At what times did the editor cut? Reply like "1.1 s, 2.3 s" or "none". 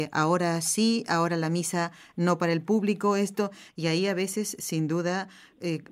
3.7 s